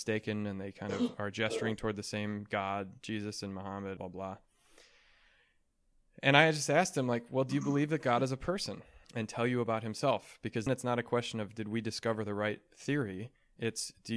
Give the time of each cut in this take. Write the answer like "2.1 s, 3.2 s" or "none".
4.0 s, 9.0 s, 10.7 s